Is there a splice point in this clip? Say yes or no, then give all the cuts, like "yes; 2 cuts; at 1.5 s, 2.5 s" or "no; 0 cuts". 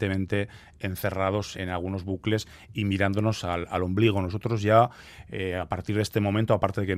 yes; 1 cut; at 1.5 s